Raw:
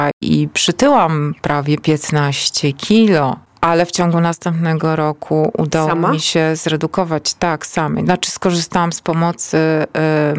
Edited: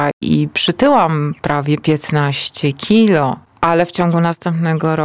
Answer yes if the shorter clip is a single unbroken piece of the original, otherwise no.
yes